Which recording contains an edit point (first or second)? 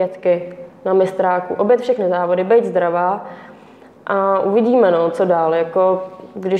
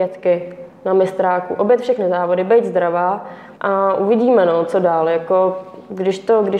second